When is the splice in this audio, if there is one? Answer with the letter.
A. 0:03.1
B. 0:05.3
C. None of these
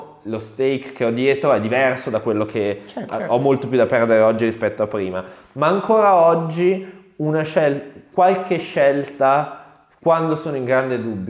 A